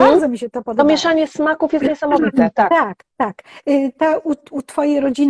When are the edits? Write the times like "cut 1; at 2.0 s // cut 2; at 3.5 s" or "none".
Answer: none